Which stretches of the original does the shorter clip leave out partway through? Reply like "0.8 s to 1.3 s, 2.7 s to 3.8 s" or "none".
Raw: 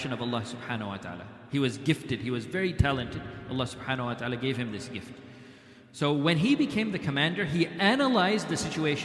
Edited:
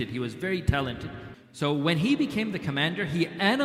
3.5 s to 5.7 s

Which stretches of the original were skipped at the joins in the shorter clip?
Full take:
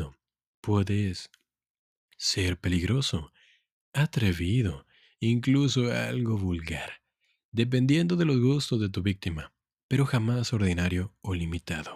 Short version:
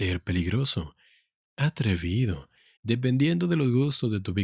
5.1 s to 7.4 s

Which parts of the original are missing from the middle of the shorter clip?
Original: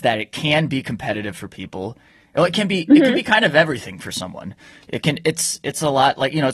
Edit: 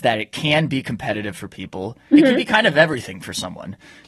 2.1 s to 2.9 s

